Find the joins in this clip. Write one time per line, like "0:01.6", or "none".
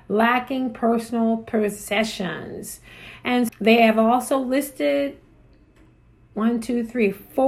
0:03.5